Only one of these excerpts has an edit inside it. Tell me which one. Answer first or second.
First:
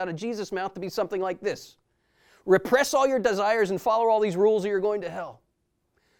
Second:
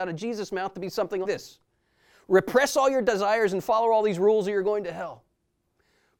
second